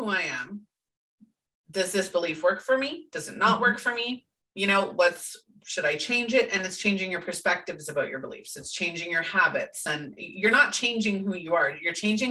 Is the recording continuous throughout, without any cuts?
yes; 0 cuts

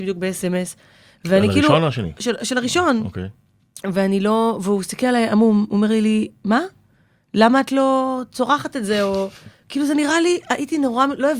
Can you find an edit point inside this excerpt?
no; 0 cuts

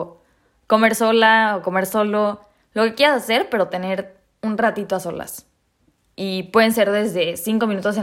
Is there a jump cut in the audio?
yes; 1 cut; at 6.1 s

